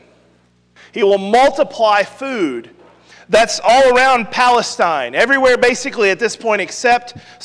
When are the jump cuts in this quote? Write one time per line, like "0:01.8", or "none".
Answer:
0:03.1